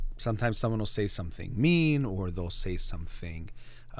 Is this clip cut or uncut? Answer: uncut